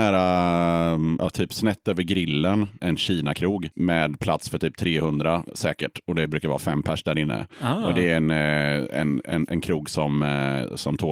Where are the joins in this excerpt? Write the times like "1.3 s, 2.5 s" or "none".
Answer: 2.8 s